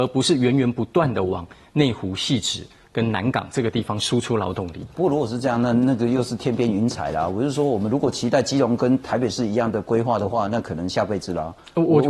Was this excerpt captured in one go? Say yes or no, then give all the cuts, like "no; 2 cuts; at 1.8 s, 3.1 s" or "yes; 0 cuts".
yes; 0 cuts